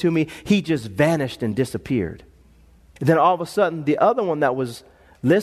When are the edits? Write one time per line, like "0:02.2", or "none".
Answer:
0:03.0